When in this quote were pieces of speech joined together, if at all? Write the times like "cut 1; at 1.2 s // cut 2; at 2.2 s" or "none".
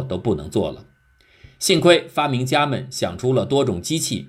none